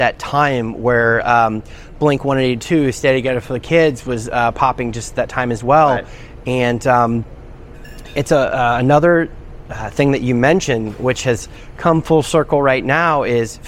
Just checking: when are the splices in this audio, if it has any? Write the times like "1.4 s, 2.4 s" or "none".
none